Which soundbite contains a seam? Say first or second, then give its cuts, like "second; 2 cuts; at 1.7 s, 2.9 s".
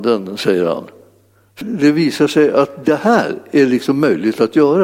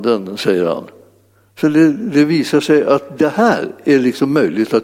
first; 1 cut; at 1.6 s